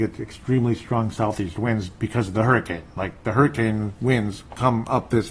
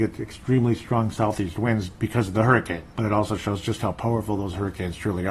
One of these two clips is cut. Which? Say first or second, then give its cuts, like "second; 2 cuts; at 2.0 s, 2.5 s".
second; 1 cut; at 2.9 s